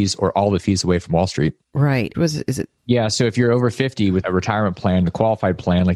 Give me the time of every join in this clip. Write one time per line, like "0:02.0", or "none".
0:02.1